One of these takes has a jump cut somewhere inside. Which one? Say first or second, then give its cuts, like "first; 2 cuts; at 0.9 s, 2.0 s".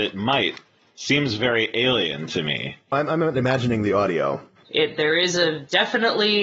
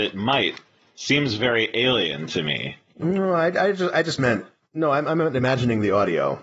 first; 2 cuts; at 2.9 s, 4.7 s